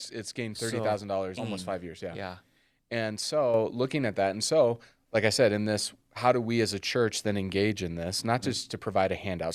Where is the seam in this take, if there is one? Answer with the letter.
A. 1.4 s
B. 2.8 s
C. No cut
A